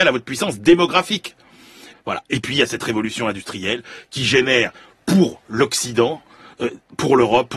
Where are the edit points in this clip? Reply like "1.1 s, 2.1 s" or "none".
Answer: 1.9 s